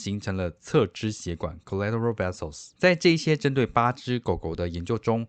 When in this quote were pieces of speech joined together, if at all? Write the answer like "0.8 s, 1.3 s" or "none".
2.7 s